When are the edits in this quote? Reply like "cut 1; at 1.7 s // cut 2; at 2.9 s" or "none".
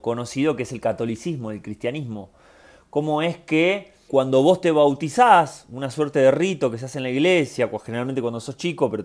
cut 1; at 4.1 s